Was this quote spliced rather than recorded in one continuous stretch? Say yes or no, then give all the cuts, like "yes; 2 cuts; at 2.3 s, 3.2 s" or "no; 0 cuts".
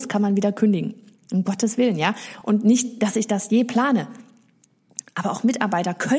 no; 0 cuts